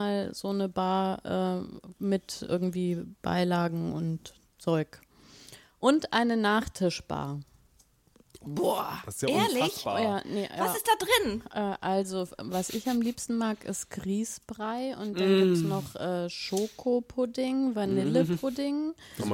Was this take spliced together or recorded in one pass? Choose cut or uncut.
uncut